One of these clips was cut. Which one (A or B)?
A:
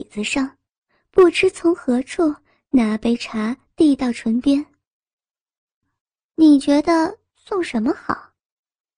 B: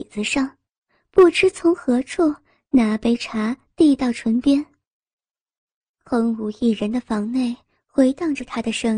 A